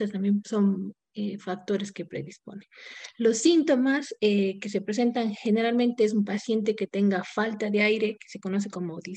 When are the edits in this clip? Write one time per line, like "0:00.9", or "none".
none